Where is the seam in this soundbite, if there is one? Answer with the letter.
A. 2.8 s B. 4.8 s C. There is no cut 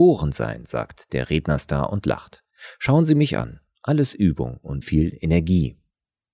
B